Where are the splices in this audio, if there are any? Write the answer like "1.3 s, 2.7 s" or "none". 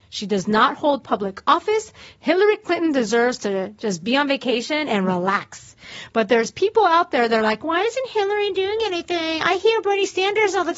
none